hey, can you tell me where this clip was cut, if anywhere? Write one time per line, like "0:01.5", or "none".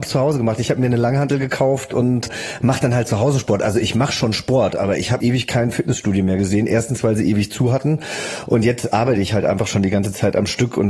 0:05.2